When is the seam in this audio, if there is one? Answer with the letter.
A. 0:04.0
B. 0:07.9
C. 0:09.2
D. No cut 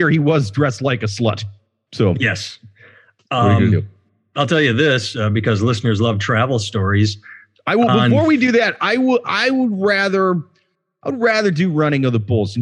D